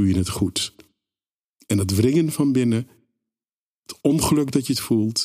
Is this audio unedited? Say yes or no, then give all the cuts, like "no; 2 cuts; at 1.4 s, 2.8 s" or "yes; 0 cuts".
yes; 0 cuts